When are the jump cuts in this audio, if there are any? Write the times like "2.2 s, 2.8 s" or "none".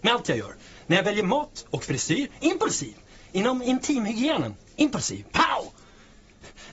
none